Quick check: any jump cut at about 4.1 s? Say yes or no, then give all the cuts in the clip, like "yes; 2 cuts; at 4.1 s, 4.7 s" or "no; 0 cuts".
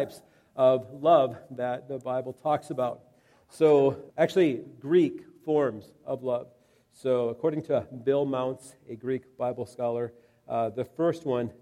yes; 1 cut; at 4.1 s